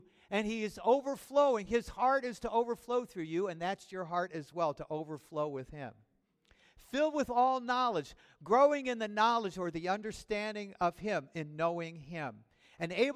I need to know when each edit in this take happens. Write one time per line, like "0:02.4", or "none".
none